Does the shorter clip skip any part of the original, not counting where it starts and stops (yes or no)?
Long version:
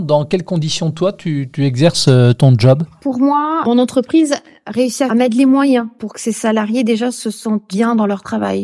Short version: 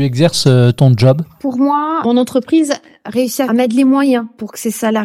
no